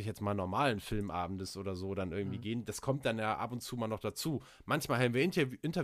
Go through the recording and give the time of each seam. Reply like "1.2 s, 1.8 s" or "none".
none